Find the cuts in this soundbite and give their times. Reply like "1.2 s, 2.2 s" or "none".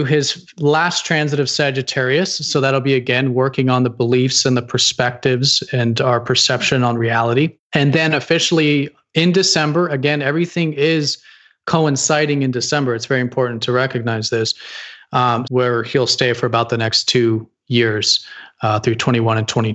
15.4 s